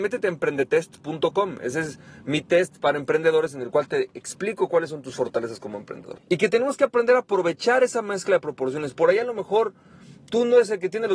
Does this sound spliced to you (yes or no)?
yes